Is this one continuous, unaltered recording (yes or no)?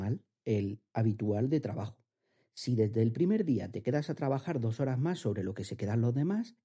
yes